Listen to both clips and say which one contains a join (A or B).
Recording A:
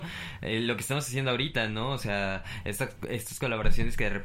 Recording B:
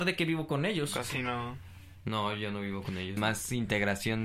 B